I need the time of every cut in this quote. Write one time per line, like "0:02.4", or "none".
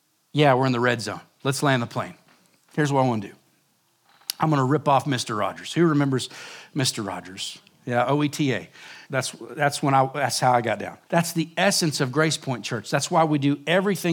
0:09.0
0:11.1